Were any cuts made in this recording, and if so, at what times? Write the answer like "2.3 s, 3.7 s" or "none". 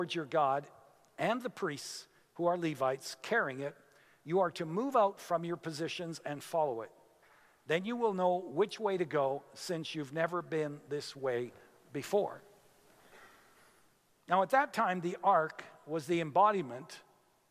none